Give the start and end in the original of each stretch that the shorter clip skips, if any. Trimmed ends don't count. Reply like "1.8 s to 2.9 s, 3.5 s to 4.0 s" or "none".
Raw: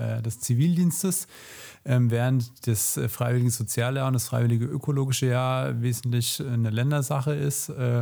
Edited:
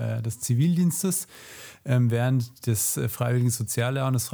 none